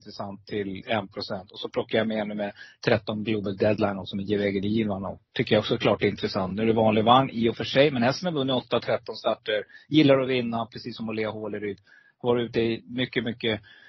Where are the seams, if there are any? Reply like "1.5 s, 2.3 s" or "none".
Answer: none